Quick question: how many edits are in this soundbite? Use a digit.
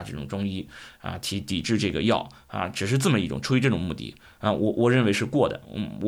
0